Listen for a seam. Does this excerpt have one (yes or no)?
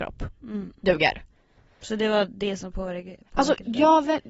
no